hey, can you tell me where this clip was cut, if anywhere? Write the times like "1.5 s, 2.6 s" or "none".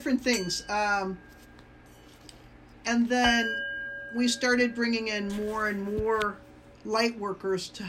6.7 s